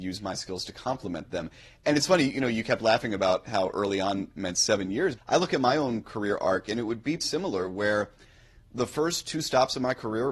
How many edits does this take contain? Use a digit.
2